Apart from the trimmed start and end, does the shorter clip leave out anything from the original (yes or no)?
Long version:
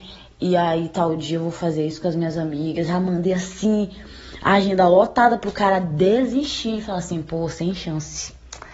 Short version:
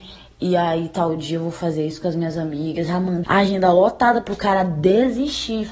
yes